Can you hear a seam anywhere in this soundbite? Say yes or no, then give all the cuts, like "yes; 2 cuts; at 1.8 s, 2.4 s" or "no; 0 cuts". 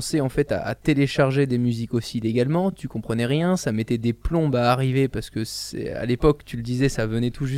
no; 0 cuts